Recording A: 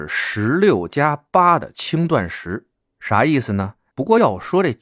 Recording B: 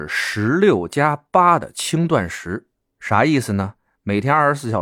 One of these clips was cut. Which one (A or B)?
A